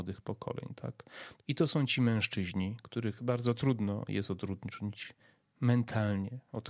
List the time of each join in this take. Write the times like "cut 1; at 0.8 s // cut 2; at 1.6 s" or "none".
cut 1; at 1.4 s